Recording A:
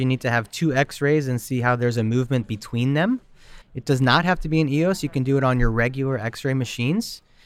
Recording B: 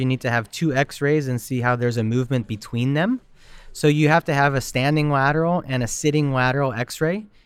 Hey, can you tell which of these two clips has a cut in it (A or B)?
A